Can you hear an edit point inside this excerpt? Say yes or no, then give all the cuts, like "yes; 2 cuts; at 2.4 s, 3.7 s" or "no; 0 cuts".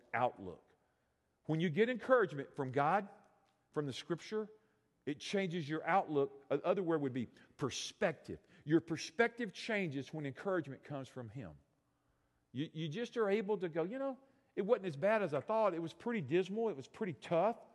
no; 0 cuts